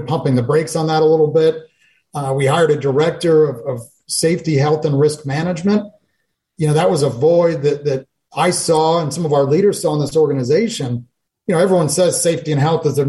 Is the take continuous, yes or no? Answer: yes